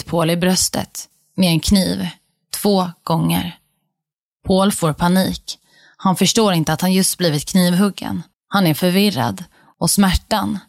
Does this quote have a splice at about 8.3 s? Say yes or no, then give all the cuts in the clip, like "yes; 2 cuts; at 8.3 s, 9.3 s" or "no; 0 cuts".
yes; 1 cut; at 8.3 s